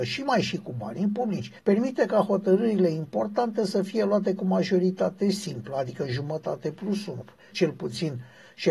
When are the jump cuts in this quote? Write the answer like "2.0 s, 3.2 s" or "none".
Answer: 1.6 s, 7.5 s